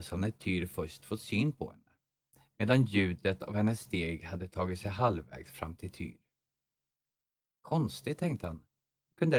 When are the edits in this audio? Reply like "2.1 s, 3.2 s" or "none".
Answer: none